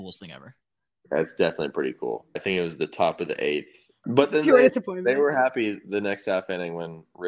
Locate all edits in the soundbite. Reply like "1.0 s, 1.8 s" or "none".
2.4 s, 4.0 s